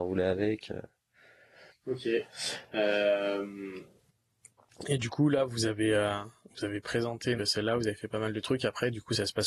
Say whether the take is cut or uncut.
cut